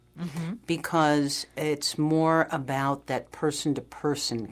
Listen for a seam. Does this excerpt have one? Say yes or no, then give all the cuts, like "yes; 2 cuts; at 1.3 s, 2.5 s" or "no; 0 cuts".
no; 0 cuts